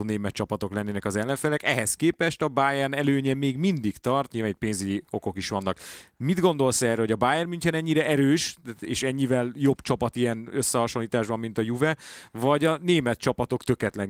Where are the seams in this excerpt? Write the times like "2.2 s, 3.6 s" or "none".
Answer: 4.3 s